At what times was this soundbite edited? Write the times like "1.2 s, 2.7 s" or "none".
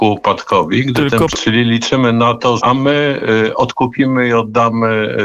1.3 s, 2.6 s